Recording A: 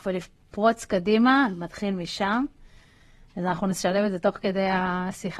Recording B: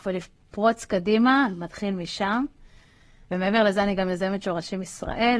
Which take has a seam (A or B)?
B